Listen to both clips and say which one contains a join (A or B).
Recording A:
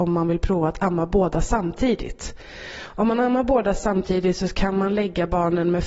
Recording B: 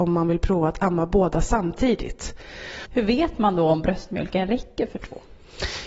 B